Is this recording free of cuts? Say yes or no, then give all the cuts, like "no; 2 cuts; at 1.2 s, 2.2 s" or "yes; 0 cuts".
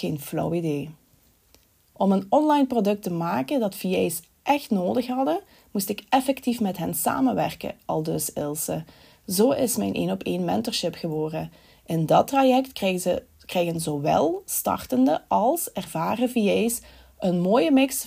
yes; 0 cuts